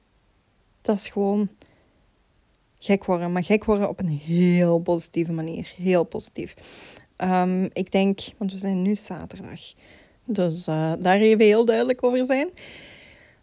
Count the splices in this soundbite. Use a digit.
2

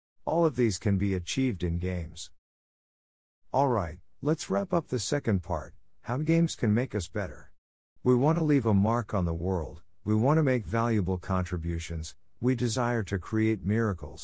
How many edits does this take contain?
2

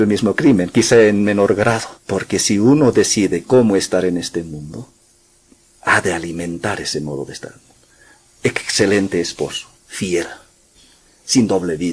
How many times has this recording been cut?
2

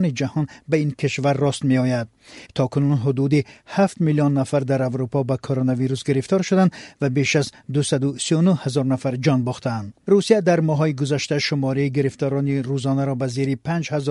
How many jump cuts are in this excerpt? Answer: 1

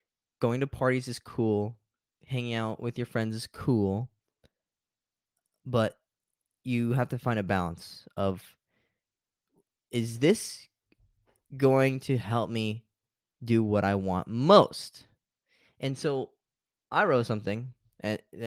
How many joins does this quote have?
0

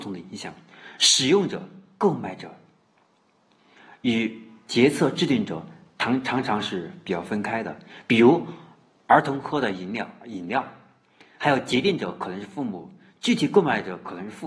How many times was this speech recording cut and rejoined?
0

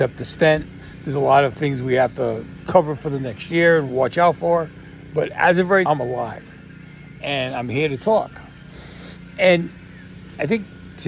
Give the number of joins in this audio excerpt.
1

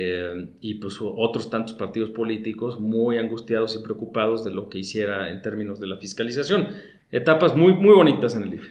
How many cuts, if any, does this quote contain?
1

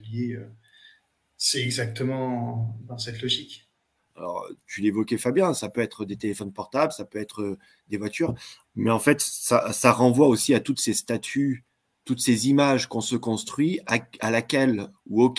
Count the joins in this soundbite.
2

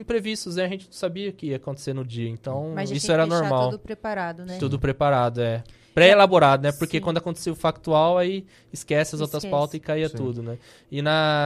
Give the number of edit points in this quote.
0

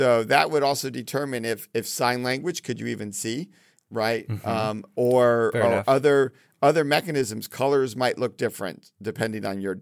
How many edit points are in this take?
0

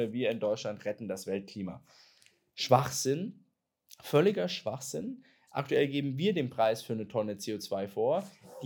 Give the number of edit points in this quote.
1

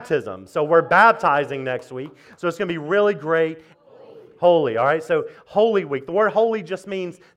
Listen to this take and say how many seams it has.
1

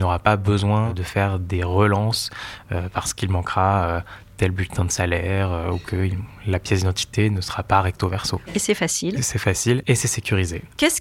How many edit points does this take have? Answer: 1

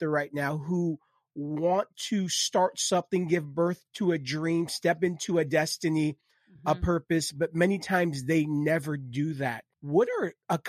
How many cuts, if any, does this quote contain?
0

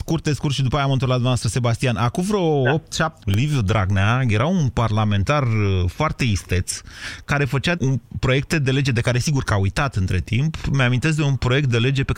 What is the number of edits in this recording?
3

